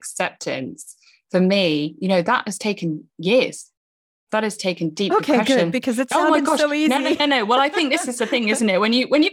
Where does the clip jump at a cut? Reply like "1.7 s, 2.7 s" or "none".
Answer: none